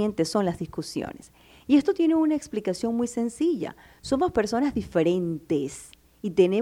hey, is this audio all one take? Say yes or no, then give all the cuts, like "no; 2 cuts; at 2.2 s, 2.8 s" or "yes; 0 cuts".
yes; 0 cuts